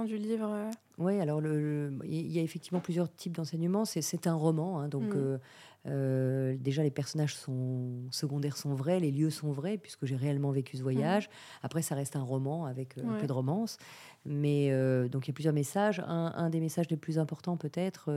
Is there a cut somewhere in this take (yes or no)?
no